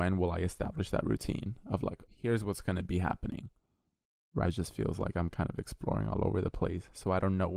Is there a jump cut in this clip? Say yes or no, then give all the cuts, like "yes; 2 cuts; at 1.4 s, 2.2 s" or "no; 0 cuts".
yes; 2 cuts; at 2.1 s, 4.4 s